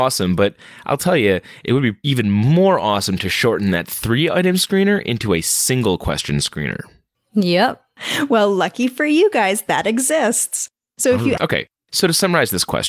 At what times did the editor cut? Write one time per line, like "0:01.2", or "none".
0:11.4